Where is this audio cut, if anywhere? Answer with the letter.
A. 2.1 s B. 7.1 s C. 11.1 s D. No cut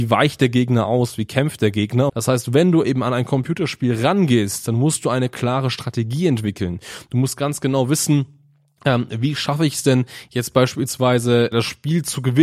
A